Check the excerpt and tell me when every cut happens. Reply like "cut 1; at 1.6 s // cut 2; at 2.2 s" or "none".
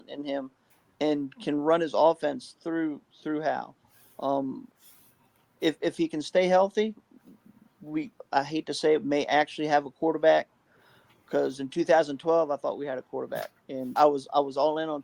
cut 1; at 14.0 s